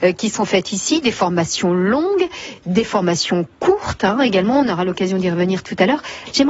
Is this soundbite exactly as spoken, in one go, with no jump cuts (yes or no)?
yes